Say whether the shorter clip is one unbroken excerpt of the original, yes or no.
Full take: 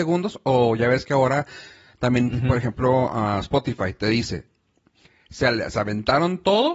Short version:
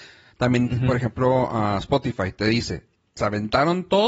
no